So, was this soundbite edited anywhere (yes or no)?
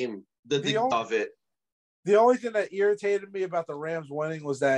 yes